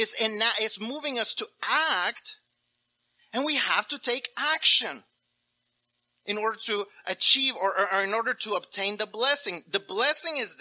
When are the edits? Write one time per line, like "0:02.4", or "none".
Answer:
none